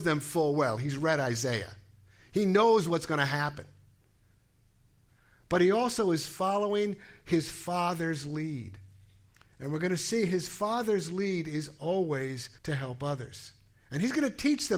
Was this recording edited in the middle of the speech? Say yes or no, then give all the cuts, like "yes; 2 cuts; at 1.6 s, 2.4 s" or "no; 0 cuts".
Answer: yes; 1 cut; at 12.6 s